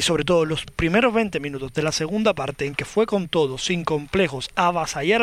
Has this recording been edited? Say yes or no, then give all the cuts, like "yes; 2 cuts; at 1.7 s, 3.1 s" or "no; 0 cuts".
no; 0 cuts